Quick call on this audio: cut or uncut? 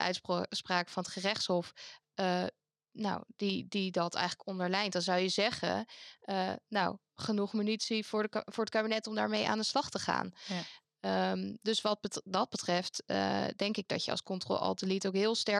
uncut